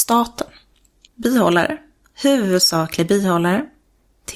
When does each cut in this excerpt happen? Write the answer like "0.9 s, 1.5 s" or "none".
1.1 s